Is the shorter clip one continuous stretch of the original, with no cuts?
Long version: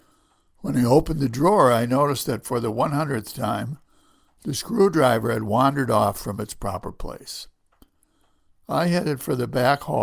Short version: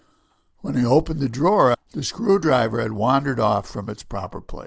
no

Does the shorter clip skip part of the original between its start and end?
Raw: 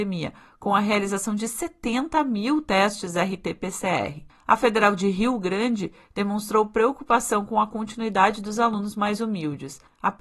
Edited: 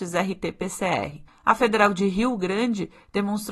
no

